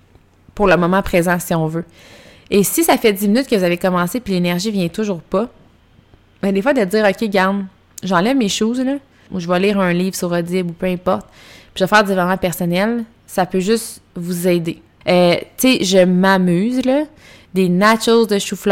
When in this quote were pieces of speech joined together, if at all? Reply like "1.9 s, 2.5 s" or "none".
9.3 s, 15.0 s